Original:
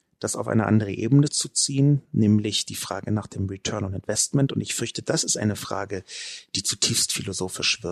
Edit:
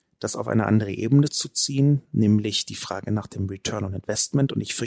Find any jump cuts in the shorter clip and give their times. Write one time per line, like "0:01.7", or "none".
none